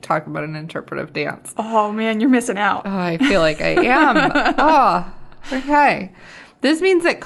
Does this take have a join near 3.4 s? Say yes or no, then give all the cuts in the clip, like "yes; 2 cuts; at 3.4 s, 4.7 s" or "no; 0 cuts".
no; 0 cuts